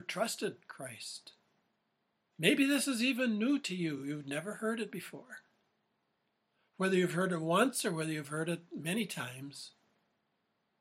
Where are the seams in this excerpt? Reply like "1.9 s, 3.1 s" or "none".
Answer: none